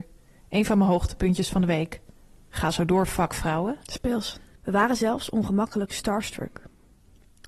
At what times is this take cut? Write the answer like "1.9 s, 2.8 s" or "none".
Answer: 4.5 s